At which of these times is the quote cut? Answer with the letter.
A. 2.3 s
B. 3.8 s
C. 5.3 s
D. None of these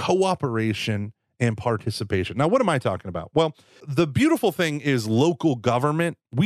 B